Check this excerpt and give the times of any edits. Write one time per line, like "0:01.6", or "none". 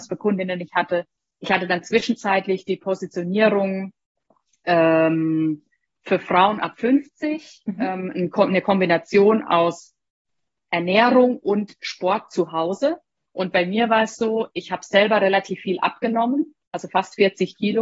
0:13.3